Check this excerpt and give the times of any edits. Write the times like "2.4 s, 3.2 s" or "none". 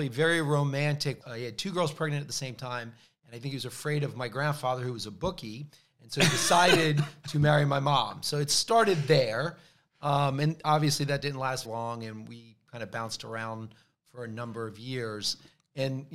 1.2 s, 11.6 s